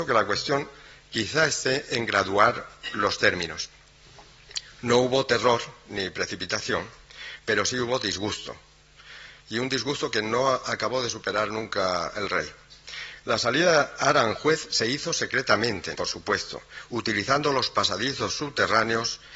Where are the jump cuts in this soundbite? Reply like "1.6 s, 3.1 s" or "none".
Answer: 15.9 s